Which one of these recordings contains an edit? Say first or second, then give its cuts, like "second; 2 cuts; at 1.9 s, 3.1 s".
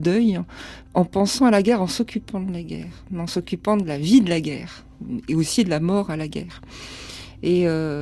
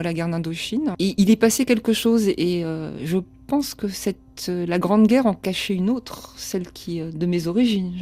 second; 1 cut; at 0.9 s